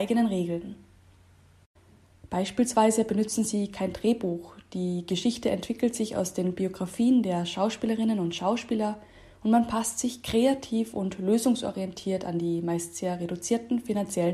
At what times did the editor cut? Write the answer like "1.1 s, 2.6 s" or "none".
none